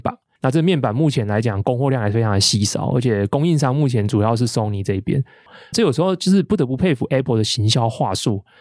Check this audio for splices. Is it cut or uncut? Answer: cut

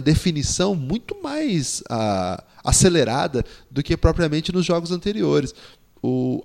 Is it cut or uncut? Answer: uncut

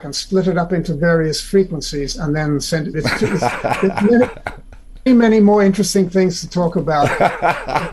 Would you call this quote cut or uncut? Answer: cut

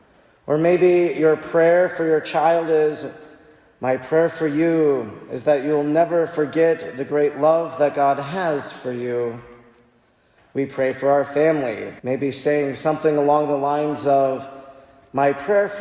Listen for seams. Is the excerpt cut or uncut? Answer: cut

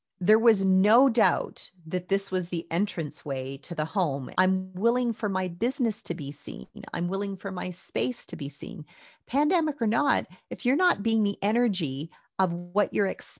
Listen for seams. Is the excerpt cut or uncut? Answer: cut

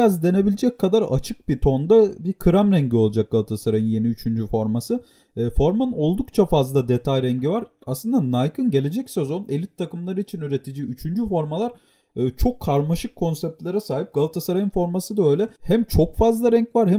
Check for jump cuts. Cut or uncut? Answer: cut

